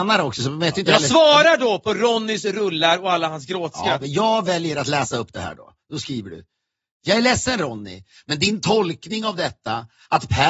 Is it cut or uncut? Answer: cut